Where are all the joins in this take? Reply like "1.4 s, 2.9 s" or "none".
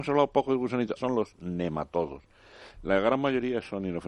1.0 s